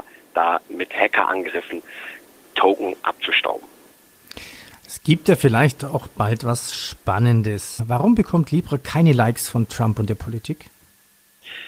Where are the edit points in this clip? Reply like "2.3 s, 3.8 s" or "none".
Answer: 7.8 s

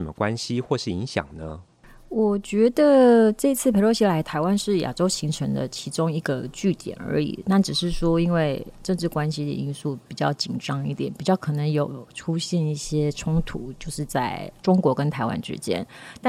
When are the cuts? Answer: none

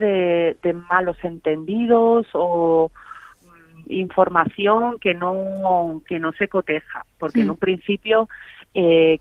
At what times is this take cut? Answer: none

